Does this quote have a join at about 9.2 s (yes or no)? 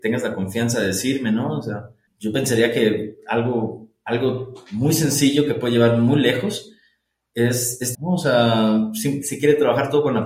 yes